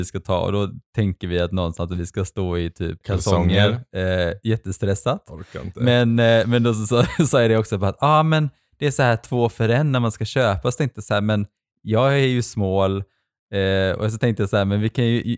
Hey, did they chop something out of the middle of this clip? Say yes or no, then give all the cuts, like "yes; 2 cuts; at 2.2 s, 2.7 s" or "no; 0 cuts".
yes; 1 cut; at 3.0 s